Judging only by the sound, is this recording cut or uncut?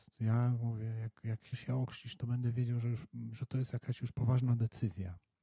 cut